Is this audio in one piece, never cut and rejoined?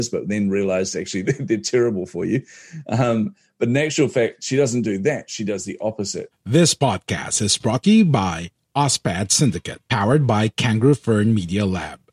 no; 2 cuts; at 6.3 s, 9.9 s

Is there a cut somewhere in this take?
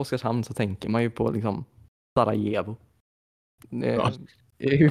no; 0 cuts

